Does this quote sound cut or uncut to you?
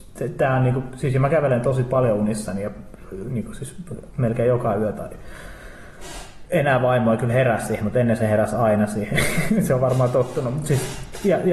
uncut